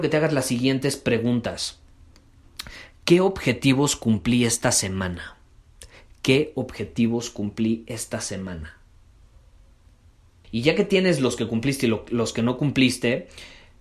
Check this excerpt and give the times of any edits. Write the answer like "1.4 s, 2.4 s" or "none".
10.4 s

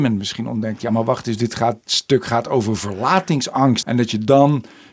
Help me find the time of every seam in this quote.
1.8 s, 3.8 s

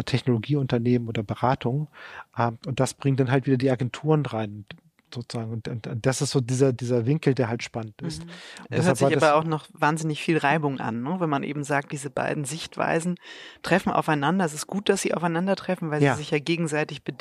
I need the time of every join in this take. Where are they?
6.8 s

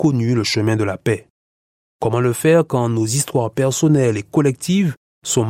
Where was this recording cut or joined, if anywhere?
1.9 s

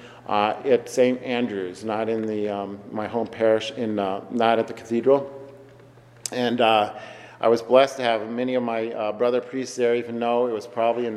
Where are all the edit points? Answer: none

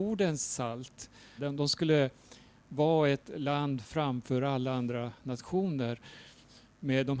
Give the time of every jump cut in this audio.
1.4 s

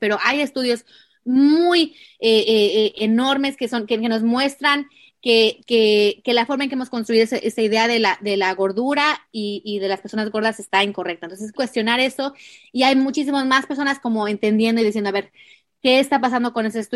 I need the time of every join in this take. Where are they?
11.6 s

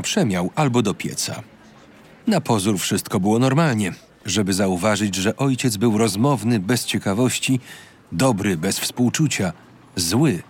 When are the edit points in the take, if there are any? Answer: 2.2 s, 4.2 s

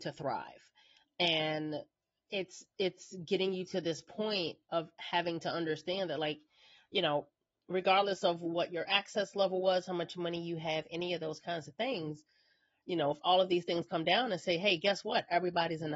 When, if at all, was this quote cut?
none

